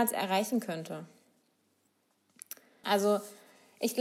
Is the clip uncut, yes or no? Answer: no